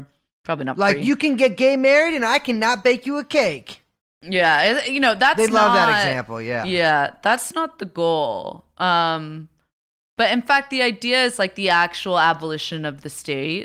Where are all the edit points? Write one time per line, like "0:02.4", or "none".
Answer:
none